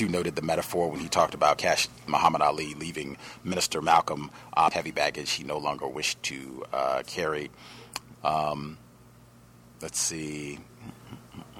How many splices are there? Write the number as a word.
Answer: two